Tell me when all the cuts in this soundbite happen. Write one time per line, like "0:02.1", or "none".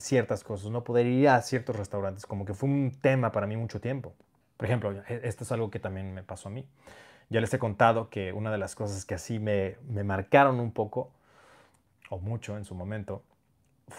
0:04.4